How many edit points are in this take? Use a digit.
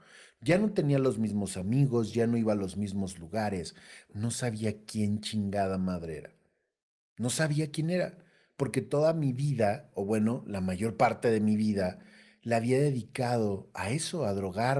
1